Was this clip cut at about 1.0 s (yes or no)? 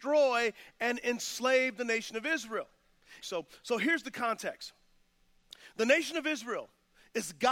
no